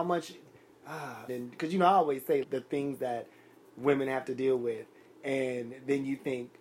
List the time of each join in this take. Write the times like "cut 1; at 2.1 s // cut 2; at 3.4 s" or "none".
cut 1; at 1.3 s // cut 2; at 2.4 s